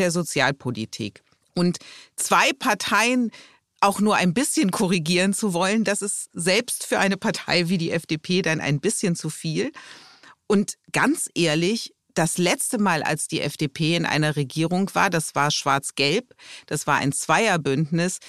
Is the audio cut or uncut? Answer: cut